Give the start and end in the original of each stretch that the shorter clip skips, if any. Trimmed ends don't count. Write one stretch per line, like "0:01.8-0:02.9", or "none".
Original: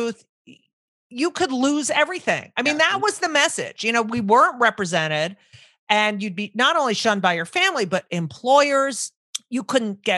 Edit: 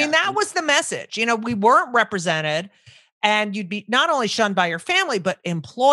none